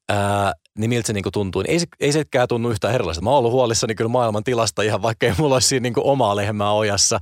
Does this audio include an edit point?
no; 0 cuts

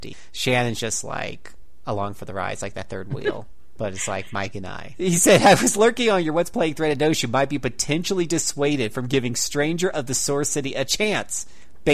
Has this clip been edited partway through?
yes; 1 cut; at 4.9 s

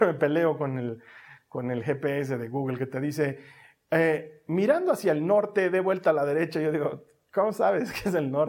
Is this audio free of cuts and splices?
yes; 0 cuts

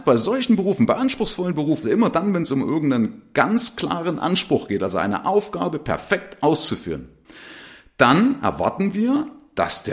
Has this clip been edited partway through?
yes; 1 cut; at 1.8 s

